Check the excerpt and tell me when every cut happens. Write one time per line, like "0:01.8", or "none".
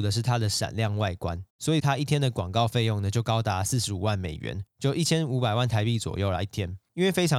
0:01.5